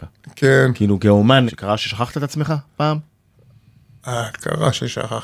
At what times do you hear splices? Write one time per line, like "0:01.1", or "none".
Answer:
0:01.5